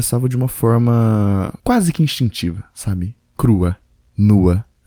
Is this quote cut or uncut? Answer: cut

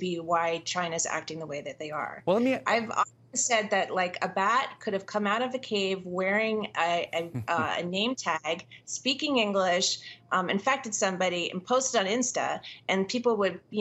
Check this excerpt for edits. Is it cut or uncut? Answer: uncut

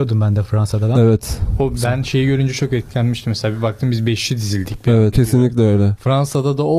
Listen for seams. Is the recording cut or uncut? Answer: cut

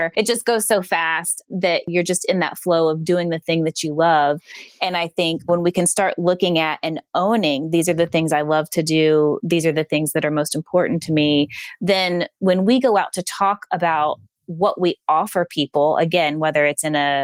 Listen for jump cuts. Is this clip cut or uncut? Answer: uncut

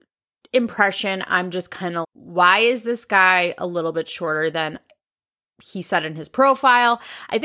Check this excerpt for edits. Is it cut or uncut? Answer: cut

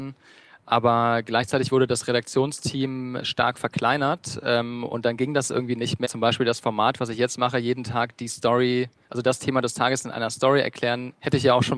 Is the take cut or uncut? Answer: cut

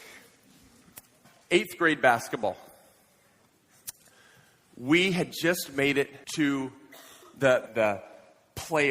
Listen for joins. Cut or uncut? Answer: cut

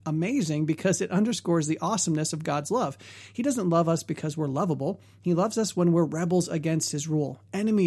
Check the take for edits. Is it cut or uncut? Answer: uncut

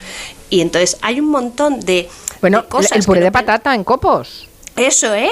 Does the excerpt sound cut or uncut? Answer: uncut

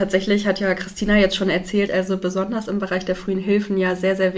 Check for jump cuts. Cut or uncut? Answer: cut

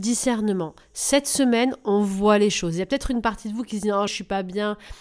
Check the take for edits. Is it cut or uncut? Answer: cut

